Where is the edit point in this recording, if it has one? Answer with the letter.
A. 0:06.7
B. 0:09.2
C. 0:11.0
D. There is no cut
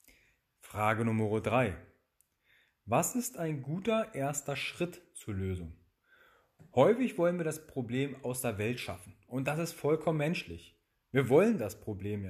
D